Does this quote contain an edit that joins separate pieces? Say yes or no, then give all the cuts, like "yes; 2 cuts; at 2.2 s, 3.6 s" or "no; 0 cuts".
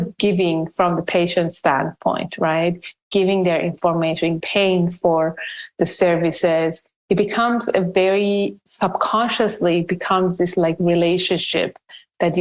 yes; 1 cut; at 4.4 s